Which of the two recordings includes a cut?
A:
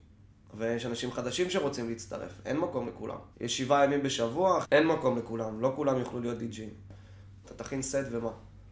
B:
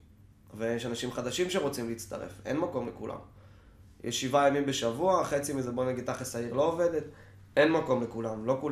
A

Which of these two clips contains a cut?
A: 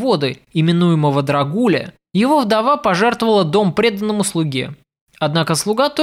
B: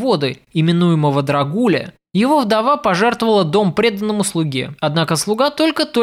B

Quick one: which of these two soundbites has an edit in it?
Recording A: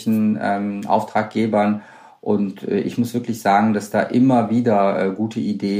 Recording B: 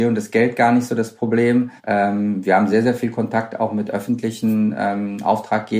B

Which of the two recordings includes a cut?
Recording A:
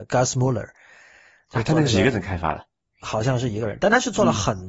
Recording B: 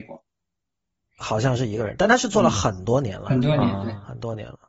B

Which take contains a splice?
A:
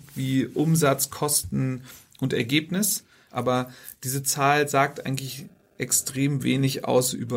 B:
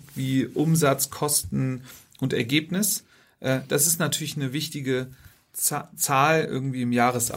A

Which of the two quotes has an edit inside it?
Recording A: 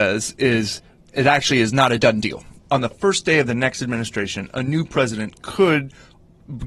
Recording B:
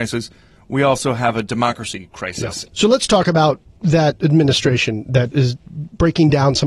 B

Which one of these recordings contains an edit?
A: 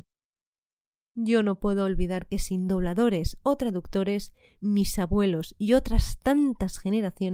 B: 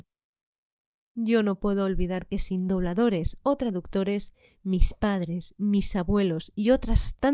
A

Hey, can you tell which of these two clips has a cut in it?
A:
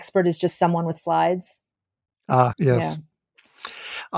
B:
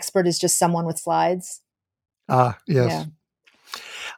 A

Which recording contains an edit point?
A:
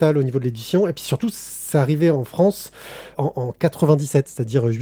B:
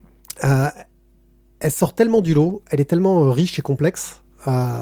A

